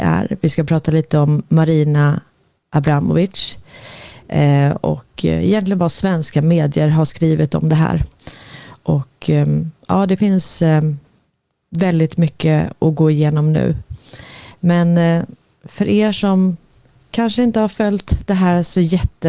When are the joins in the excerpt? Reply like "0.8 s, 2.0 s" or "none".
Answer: none

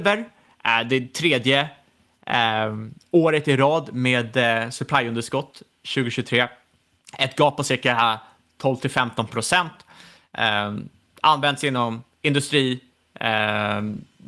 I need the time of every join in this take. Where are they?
none

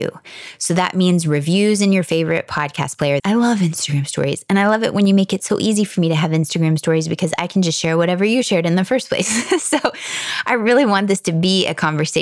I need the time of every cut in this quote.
3.2 s

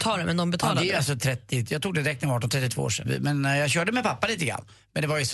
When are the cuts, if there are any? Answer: 3.0 s

